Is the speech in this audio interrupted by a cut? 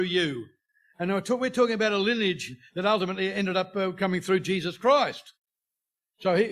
no; 0 cuts

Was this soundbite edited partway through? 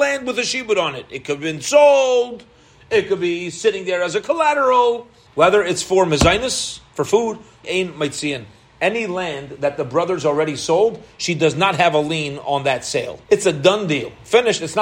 yes; 3 cuts; at 5.3 s, 7.6 s, 13.2 s

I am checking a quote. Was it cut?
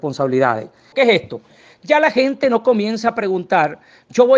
yes; 1 cut; at 0.9 s

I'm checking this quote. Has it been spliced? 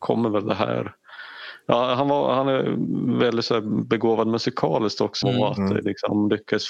yes; 1 cut; at 5.2 s

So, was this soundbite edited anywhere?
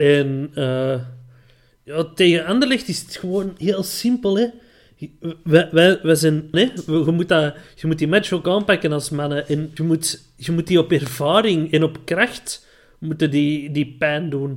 yes; 2 cuts; at 6.5 s, 9.8 s

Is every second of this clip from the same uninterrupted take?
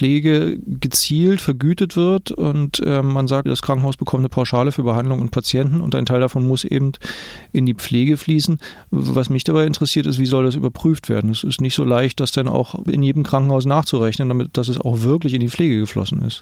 no; 1 cut; at 3.5 s

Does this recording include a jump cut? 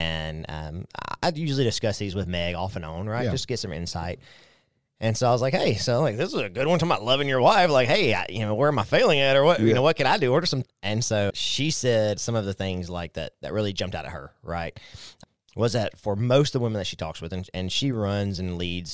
no; 0 cuts

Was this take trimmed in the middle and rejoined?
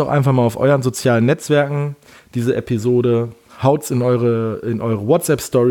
no; 0 cuts

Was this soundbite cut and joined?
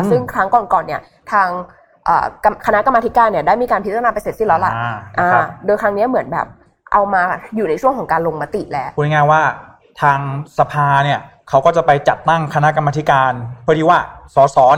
no; 0 cuts

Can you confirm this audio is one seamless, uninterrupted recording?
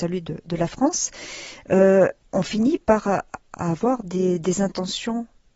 no; 1 cut; at 2.2 s

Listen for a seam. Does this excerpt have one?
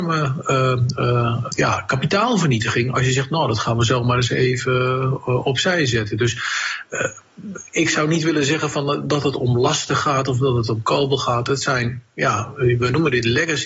yes; 1 cut; at 1.5 s

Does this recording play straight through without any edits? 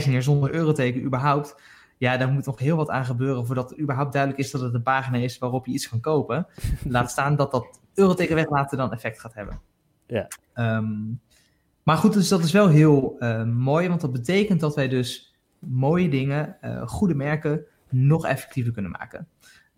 yes; 0 cuts

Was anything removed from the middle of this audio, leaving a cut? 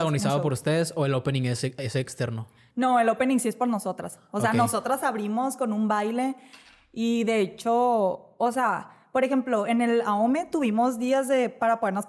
no; 0 cuts

